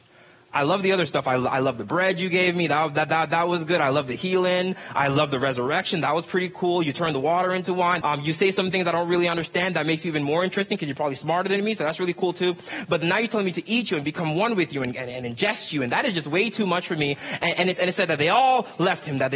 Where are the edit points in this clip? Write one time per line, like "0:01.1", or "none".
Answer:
0:08.0